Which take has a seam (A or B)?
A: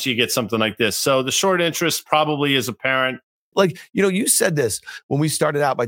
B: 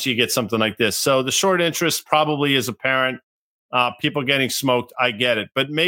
A